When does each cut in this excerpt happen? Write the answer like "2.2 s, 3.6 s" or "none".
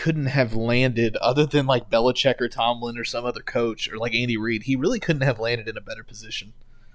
none

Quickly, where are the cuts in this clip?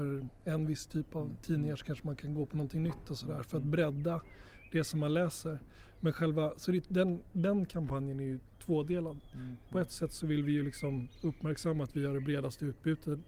none

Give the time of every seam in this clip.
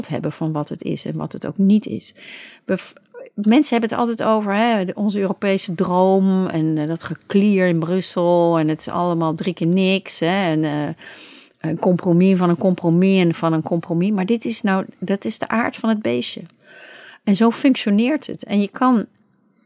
none

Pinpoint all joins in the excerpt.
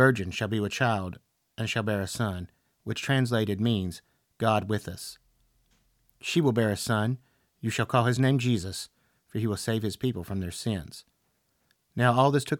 2.7 s, 6.2 s

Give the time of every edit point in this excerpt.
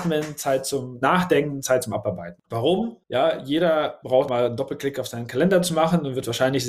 2.4 s, 4.3 s

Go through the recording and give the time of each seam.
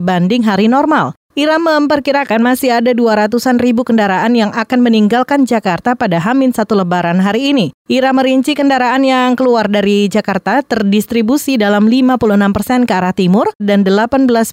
13.6 s

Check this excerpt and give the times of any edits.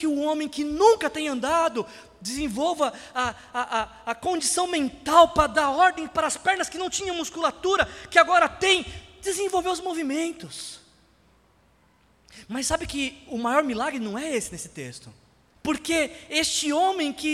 15.6 s

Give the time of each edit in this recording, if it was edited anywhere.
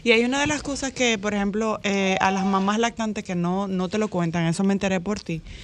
none

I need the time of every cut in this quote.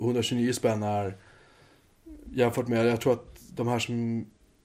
2.2 s

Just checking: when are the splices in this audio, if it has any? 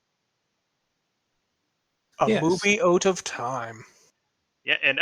none

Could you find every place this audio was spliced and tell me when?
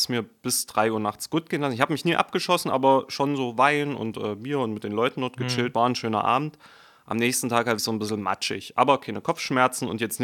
7.8 s

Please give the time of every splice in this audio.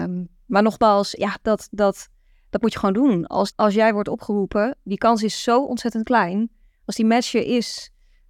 1.2 s, 3.5 s

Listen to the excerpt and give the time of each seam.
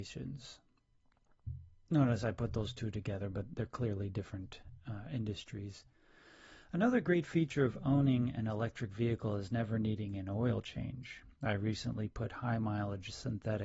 none

